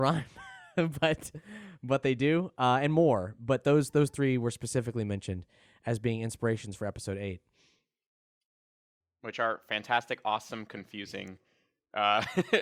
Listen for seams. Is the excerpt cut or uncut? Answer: uncut